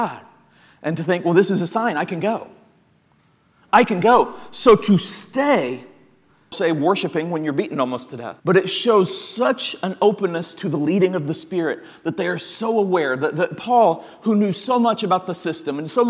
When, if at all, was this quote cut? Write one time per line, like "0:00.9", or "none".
0:06.5
0:08.4